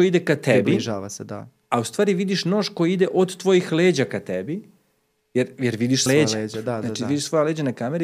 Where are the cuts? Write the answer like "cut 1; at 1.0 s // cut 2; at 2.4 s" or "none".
cut 1; at 6.1 s

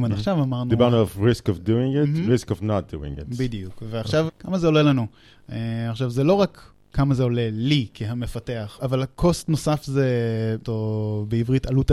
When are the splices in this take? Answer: cut 1; at 4.3 s // cut 2; at 8.8 s // cut 3; at 10.6 s

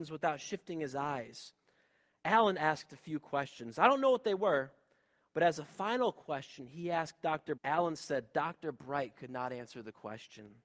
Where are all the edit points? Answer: cut 1; at 7.6 s

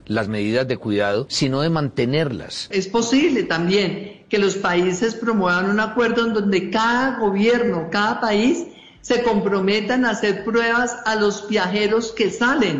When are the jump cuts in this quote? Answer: cut 1; at 2.7 s

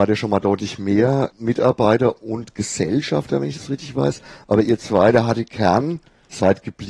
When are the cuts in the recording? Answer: none

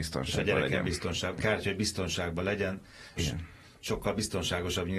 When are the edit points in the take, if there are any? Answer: cut 1; at 1.4 s // cut 2; at 3.2 s

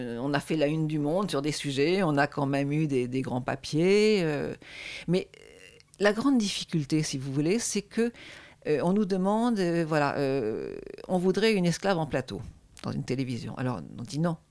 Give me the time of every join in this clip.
none

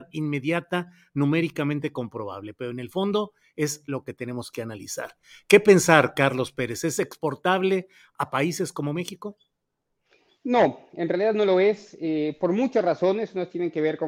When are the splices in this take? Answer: none

